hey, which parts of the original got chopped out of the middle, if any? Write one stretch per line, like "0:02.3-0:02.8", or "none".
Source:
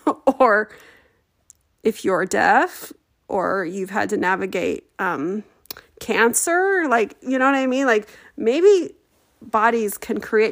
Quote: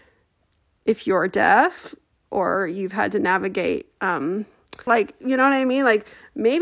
0:05.8-0:06.9